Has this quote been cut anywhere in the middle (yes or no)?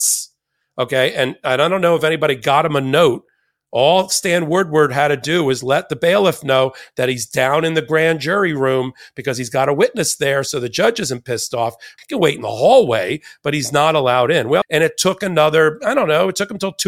yes